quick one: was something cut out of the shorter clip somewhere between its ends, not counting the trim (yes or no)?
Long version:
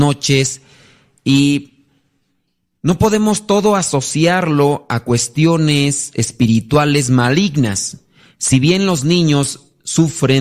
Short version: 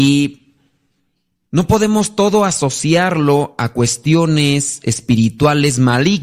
no